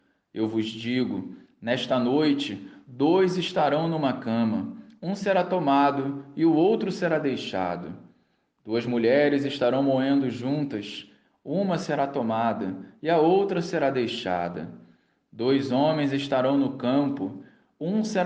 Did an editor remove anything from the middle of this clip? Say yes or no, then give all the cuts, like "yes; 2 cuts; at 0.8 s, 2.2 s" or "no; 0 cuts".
no; 0 cuts